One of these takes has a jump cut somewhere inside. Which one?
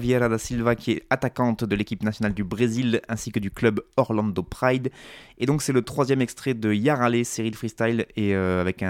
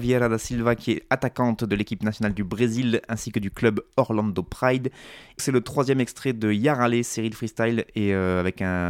second; 1 cut; at 5.4 s

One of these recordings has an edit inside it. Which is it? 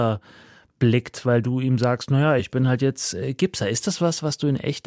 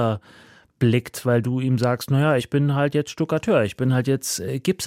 first; 1 cut; at 2.4 s

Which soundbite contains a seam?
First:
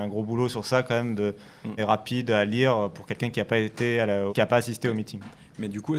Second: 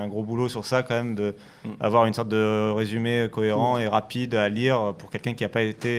first; 2 cuts; at 1.8 s, 4.3 s

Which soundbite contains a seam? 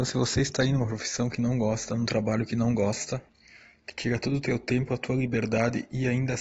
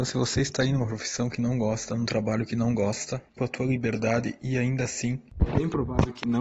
second; 1 cut; at 3.4 s

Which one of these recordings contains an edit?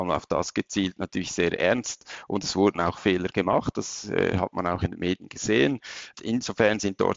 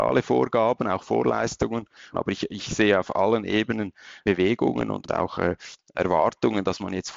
second; 2 cuts; at 2.1 s, 4.2 s

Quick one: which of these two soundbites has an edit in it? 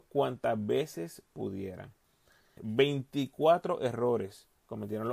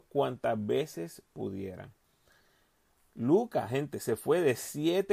first; 1 cut; at 2.6 s

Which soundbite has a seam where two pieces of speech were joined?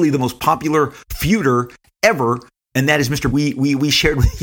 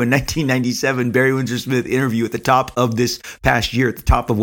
first; 1 cut; at 3.3 s

